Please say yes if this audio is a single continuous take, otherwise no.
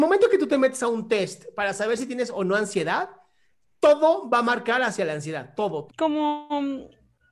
no